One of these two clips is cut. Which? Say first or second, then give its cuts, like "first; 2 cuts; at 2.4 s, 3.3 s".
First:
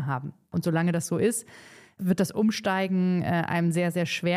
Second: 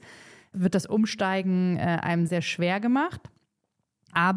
second; 1 cut; at 2.3 s